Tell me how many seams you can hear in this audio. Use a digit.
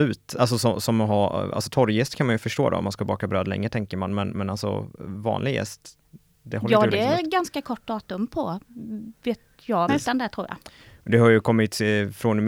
1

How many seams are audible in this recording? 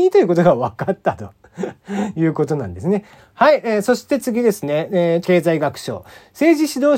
2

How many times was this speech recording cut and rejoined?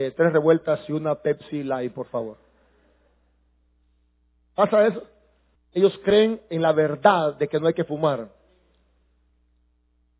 1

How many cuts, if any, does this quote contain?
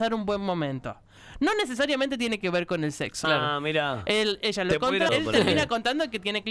2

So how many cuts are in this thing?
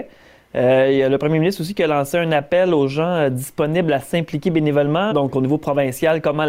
1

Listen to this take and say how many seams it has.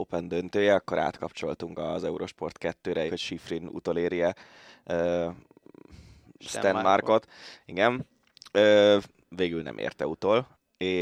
1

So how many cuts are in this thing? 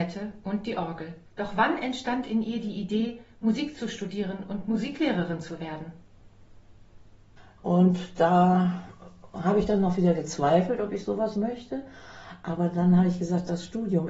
2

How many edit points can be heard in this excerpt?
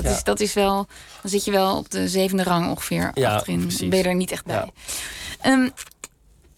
0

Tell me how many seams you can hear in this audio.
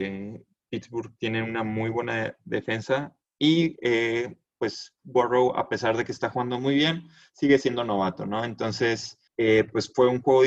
1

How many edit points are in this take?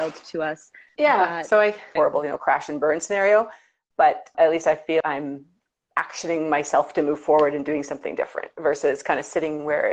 2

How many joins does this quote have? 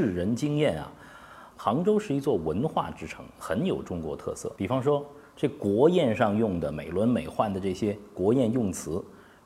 2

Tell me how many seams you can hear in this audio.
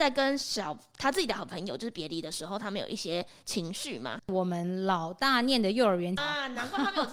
2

